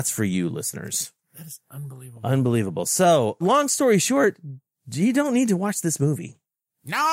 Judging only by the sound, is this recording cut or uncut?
cut